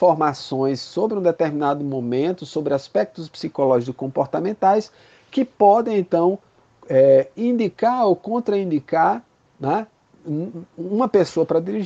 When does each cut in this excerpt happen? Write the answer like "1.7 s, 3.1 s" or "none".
none